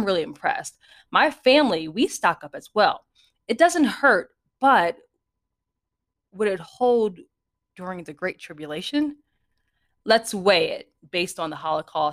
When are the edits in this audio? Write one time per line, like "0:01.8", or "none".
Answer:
none

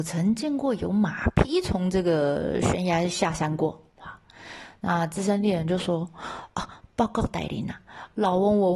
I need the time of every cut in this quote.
none

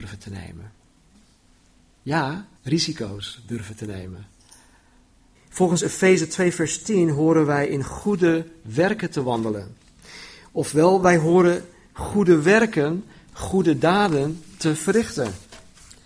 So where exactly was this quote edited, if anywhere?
0:02.6
0:05.3

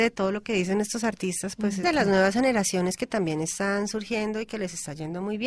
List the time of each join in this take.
0:01.8

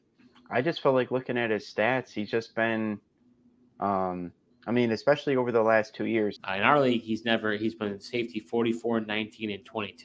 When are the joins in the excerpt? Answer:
0:06.4

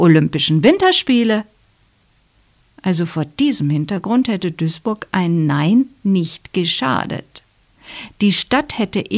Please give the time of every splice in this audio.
none

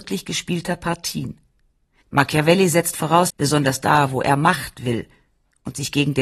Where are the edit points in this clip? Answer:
0:02.0
0:03.3

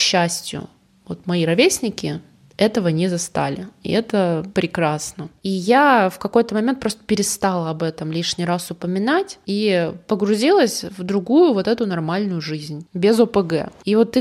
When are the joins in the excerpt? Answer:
0:05.4

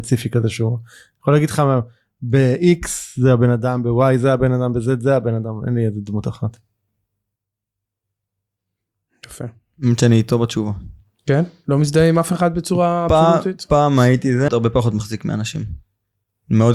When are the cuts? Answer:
0:14.5

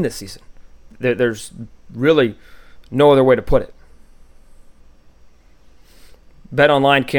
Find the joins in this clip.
none

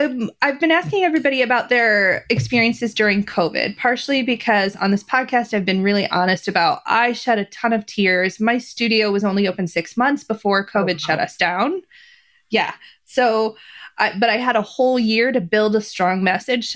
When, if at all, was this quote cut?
none

